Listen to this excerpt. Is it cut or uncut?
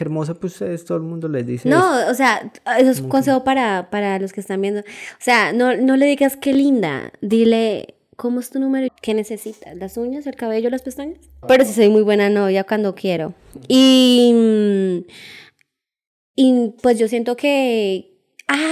cut